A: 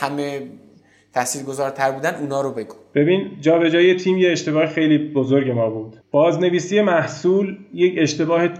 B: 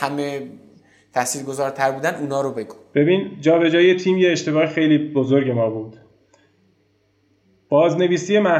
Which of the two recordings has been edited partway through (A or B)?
A